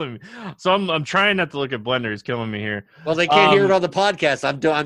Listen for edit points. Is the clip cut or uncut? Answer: uncut